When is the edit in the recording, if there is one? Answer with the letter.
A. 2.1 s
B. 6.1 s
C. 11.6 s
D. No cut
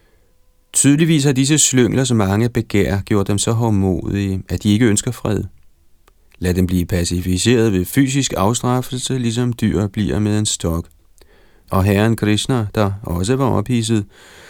C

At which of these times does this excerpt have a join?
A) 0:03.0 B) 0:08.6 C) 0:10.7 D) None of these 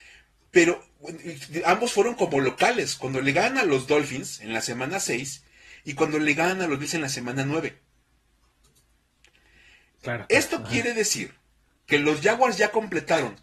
D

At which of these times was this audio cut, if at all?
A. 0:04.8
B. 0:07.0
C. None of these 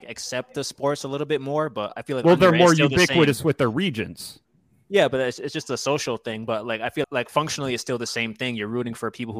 B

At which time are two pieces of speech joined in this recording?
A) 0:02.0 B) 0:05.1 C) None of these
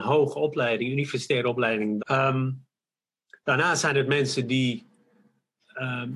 A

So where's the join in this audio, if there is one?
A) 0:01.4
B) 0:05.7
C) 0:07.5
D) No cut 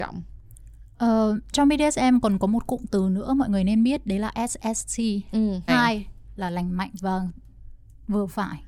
B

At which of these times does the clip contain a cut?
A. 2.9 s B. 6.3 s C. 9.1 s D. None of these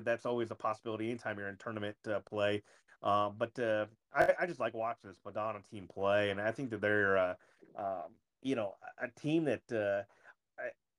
D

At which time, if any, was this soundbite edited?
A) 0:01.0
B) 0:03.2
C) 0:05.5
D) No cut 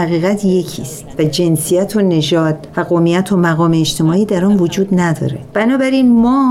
C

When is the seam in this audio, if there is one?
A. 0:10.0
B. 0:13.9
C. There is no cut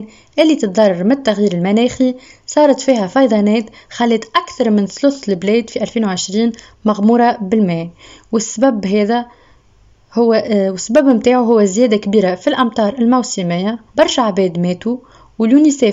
B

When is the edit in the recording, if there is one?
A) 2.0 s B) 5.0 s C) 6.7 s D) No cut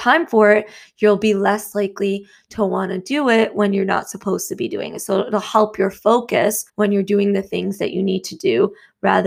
C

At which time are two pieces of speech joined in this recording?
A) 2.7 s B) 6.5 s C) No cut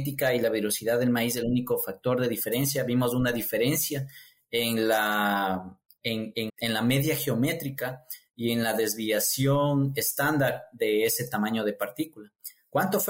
B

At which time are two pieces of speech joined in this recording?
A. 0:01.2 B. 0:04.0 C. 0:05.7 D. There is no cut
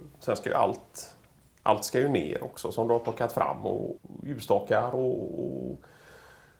B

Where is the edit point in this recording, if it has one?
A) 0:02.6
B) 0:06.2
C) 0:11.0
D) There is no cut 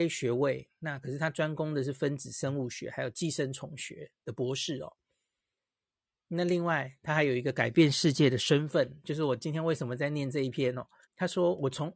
C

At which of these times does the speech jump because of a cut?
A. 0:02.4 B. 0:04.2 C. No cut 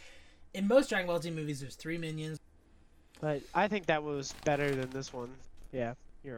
A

